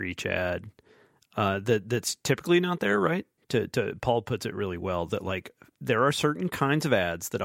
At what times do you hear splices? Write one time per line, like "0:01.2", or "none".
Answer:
0:03.4